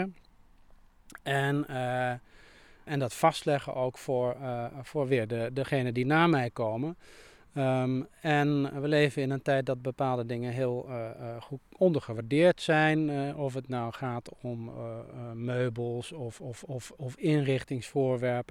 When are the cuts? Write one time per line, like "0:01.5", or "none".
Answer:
0:02.9